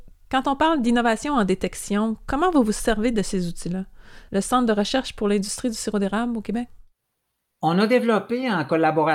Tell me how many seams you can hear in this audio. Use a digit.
1